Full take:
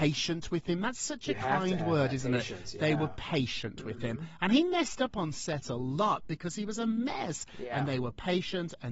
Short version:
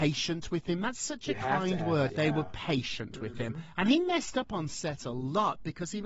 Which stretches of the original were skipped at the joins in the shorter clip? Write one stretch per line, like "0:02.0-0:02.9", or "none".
0:02.1-0:02.7